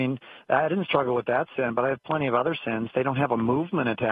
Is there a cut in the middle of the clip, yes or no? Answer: no